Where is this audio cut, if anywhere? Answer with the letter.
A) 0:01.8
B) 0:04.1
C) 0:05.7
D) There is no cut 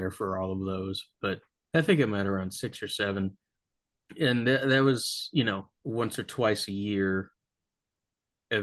C